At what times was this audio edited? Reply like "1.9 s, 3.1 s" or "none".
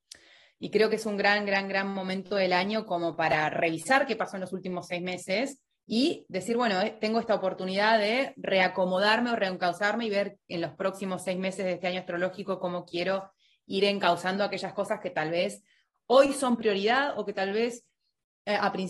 none